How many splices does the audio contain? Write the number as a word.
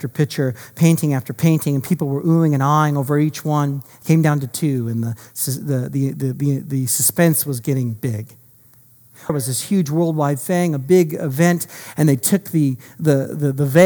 one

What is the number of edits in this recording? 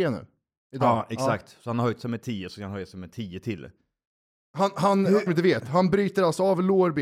one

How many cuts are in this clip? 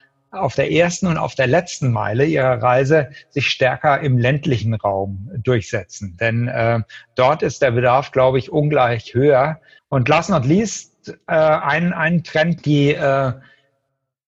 two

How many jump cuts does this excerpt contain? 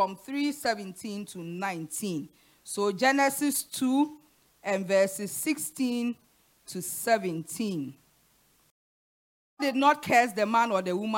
zero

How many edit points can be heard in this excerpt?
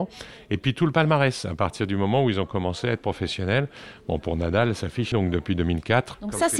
one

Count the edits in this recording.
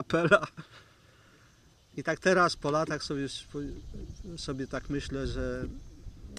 zero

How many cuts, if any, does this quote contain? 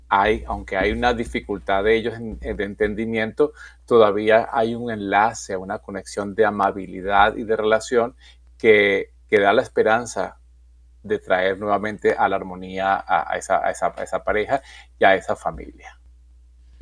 zero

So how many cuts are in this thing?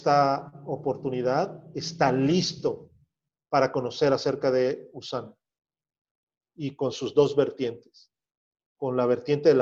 zero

